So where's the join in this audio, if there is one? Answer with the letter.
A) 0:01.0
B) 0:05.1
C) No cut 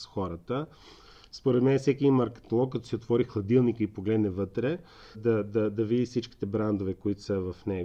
B